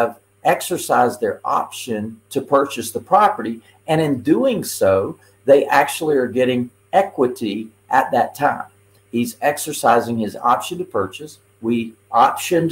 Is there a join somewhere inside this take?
yes; 1 cut; at 9.0 s

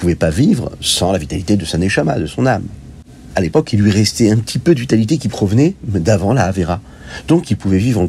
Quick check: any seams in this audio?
yes; 1 cut; at 3.3 s

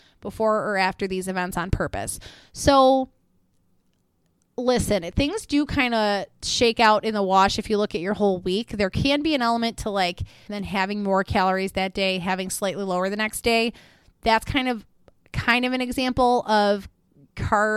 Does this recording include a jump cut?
yes; 1 cut; at 10.5 s

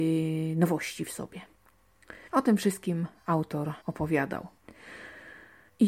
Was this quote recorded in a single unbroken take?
no; 2 cuts; at 2.3 s, 3.8 s

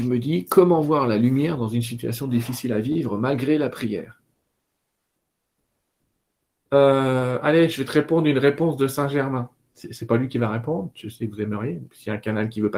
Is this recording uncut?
yes; 0 cuts

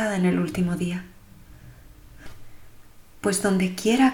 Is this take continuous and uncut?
yes; 0 cuts

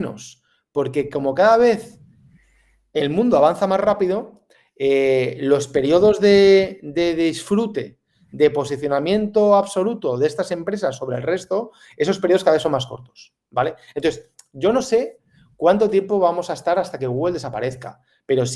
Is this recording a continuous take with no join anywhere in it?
yes; 0 cuts

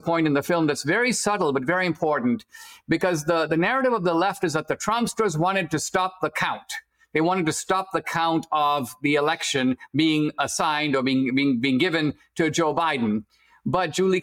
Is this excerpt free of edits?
yes; 0 cuts

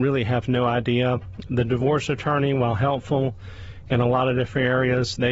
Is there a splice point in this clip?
no; 0 cuts

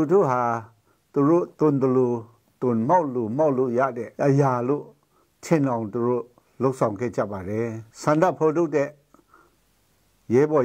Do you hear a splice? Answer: yes; 2 cuts; at 4.2 s, 7.9 s

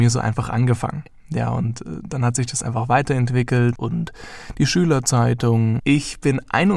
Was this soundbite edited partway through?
yes; 2 cuts; at 3.7 s, 5.8 s

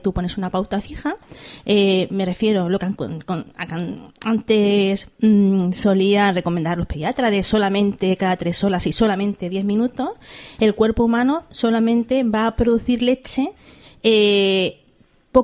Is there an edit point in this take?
no; 0 cuts

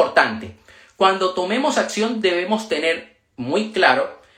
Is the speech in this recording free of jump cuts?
yes; 0 cuts

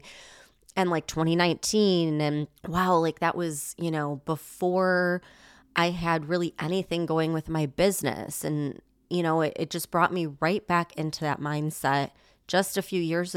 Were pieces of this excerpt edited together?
yes; 1 cut; at 2.6 s

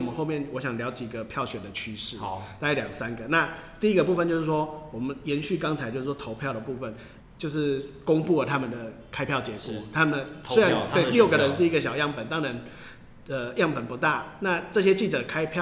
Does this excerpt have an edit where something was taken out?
yes; 1 cut; at 7.2 s

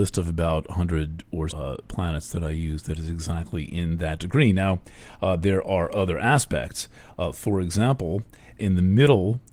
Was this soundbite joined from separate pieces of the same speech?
yes; 2 cuts; at 1.5 s, 8.6 s

